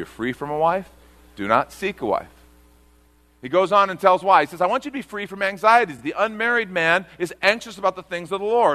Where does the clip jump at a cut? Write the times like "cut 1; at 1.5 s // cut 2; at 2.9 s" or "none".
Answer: none